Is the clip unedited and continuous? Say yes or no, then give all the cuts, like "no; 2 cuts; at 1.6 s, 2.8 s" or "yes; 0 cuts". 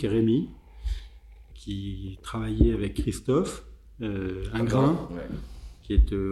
no; 1 cut; at 1.5 s